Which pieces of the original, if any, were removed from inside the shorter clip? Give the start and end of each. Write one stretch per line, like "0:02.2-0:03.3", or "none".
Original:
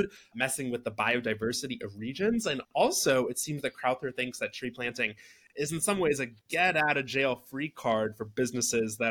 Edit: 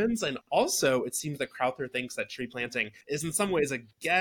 0:05.2-0:05.5